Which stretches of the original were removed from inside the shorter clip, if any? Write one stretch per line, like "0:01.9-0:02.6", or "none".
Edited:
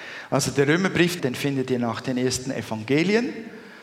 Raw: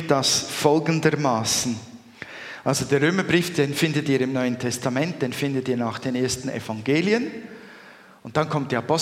0:03.5-0:05.2

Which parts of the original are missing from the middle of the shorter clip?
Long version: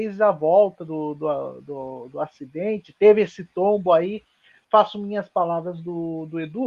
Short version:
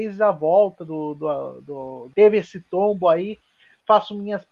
0:02.1-0:03.0

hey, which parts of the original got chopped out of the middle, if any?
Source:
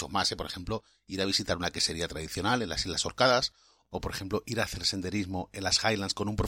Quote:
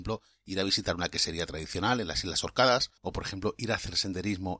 0:03.6-0:03.9

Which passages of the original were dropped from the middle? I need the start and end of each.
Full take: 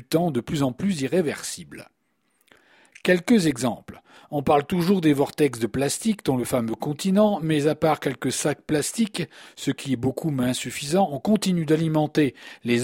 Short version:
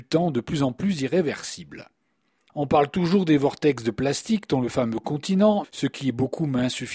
0:02.5-0:04.3
0:07.4-0:09.5

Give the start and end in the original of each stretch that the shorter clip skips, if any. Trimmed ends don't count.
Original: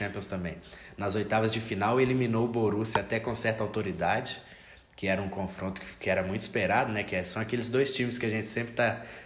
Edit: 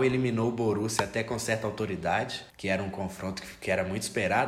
0:04.5-0:04.9

